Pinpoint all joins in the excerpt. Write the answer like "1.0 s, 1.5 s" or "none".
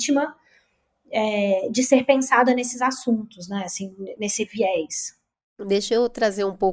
4.2 s